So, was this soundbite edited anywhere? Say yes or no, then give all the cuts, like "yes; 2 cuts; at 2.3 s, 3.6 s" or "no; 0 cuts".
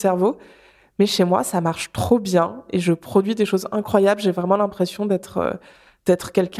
no; 0 cuts